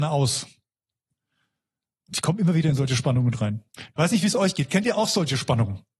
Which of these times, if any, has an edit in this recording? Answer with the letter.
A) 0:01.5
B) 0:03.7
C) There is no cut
B